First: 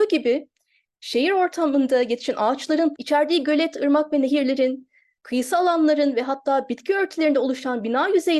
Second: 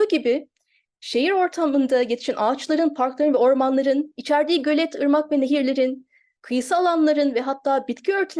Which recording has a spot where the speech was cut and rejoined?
first; 1 cut; at 3.0 s

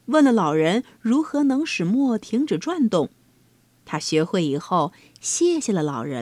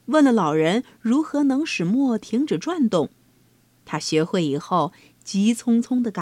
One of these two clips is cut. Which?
second; 1 cut; at 5.1 s

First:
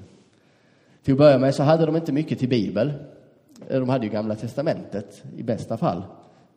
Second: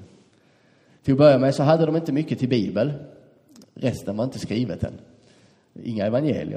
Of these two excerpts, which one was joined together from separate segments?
second; 1 cut; at 3.6 s

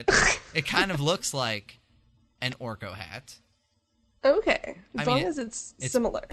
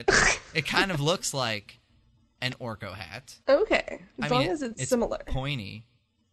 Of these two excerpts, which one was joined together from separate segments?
second; 2 cuts; at 3.4 s, 4.7 s

